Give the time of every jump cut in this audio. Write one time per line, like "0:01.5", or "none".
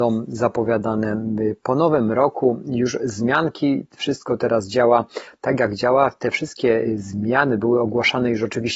none

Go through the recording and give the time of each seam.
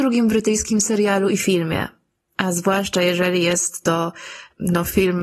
none

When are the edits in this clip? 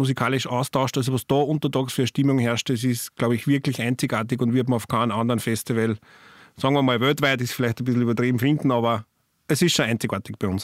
none

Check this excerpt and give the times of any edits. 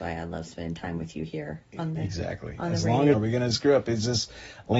0:03.1

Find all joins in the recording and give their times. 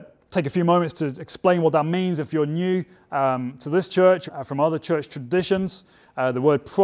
0:04.3

